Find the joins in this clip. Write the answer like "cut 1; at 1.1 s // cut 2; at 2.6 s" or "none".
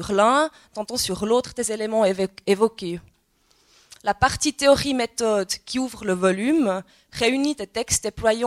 none